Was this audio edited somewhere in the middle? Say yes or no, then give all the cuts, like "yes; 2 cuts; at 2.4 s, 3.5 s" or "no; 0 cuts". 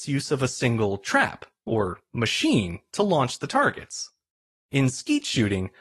no; 0 cuts